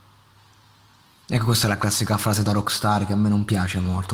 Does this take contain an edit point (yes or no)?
no